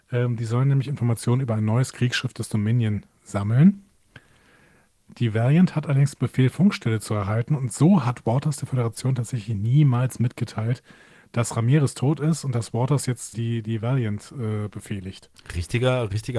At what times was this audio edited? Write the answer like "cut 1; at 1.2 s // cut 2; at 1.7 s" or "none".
cut 1; at 13.3 s